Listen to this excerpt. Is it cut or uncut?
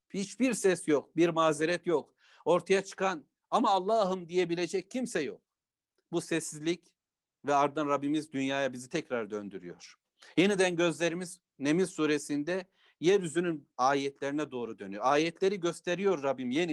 uncut